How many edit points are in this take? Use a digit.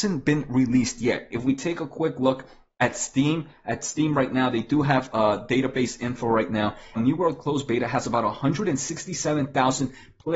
2